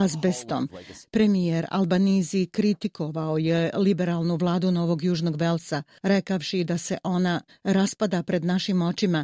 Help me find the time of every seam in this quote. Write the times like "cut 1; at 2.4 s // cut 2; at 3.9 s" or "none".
cut 1; at 1.0 s // cut 2; at 7.5 s